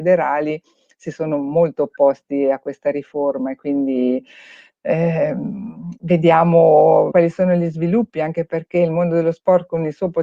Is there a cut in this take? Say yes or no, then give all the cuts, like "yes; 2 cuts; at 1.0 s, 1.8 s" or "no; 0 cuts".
yes; 1 cut; at 7.1 s